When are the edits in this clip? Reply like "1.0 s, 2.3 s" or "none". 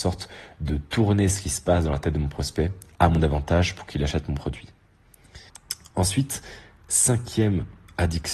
5.5 s